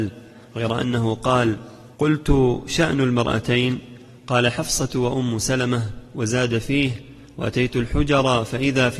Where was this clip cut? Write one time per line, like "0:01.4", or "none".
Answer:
0:01.9

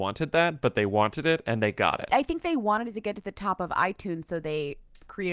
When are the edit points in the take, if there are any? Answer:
none

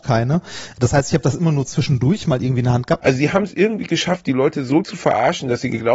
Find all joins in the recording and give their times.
0:03.0

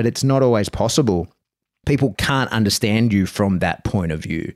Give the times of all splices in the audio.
none

